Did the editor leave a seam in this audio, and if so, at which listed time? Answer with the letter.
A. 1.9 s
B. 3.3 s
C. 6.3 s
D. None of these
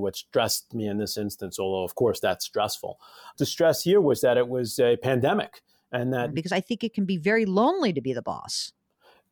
C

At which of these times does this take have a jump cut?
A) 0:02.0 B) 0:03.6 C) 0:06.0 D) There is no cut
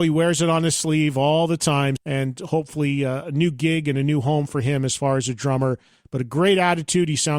A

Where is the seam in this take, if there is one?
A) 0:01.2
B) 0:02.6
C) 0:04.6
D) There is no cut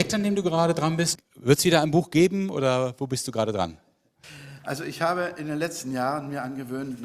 A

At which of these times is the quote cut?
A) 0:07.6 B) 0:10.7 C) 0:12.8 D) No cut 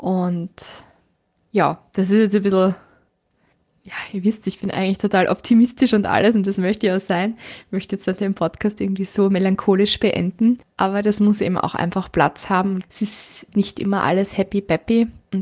C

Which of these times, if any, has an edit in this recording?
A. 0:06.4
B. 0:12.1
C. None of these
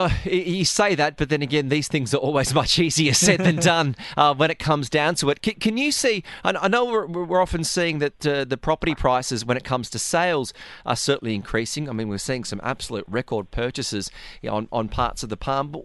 C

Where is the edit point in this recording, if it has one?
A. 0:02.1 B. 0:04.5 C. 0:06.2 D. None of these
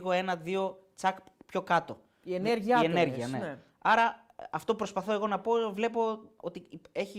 D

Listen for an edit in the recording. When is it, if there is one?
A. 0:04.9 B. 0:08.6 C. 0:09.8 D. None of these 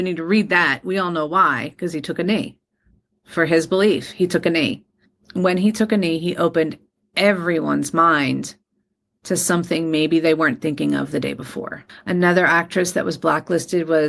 D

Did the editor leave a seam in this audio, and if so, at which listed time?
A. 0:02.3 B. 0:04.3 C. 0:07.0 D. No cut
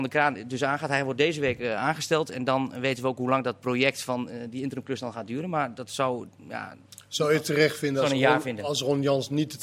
D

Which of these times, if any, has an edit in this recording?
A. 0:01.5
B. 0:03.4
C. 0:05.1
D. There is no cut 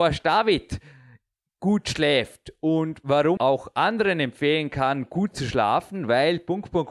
B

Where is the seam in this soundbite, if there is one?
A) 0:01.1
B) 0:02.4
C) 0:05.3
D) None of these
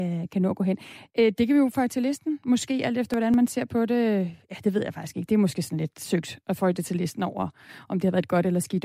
D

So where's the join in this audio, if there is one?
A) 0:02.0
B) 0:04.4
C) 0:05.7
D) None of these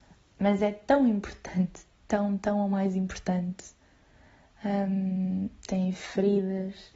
C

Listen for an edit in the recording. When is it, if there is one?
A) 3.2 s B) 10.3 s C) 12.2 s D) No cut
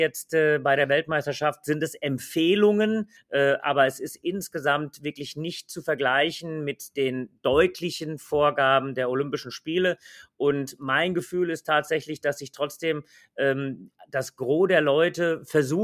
A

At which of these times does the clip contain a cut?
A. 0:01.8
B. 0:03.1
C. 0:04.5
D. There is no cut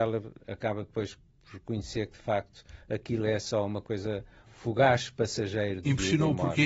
C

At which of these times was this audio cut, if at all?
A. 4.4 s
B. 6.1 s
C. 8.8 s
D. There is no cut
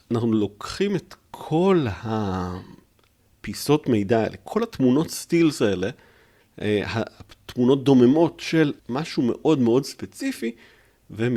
C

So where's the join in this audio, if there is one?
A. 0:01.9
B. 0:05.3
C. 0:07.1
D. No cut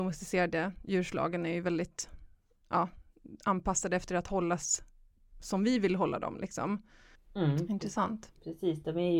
C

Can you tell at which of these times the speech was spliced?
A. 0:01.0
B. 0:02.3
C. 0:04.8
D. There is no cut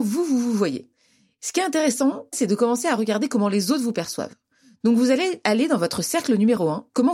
B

